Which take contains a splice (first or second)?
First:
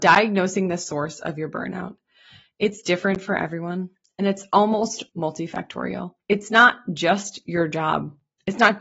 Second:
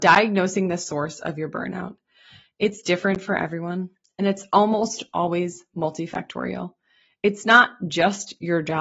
first